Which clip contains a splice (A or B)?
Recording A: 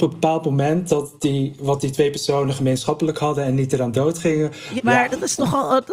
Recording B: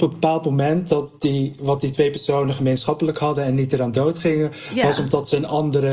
A